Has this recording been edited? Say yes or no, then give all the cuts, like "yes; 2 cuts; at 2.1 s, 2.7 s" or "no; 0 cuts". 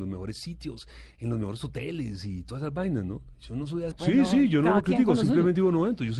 yes; 1 cut; at 3.9 s